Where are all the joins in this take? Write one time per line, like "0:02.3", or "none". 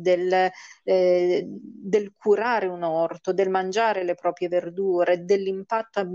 none